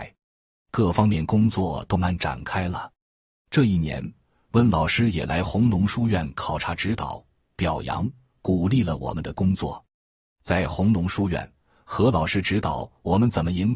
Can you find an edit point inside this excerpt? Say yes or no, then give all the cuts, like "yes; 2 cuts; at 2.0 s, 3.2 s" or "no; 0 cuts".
yes; 1 cut; at 2.0 s